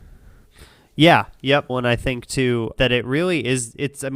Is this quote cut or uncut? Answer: cut